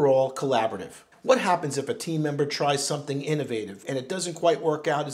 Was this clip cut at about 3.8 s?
yes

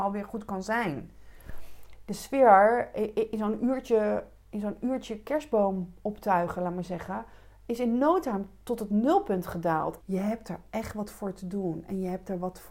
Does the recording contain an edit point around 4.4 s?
yes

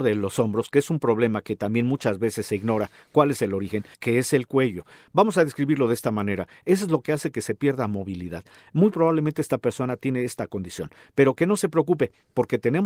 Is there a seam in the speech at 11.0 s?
no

